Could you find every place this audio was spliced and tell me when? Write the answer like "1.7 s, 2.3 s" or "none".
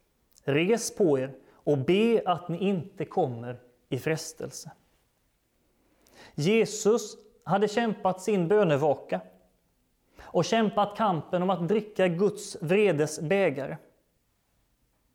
none